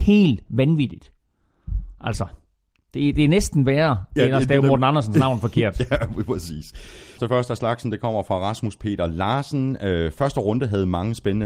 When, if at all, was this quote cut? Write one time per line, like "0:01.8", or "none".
0:07.2